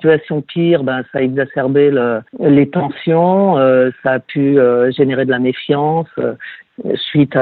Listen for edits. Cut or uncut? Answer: cut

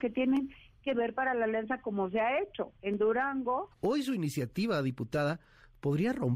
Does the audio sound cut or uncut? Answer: cut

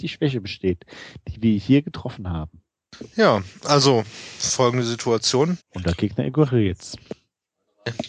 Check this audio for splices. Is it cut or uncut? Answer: cut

